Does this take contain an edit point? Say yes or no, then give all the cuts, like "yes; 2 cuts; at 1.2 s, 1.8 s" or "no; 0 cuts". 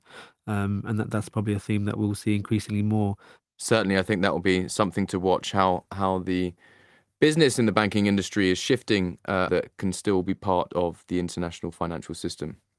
yes; 1 cut; at 9.5 s